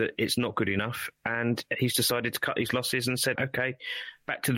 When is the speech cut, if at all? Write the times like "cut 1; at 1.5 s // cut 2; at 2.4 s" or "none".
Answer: cut 1; at 3.4 s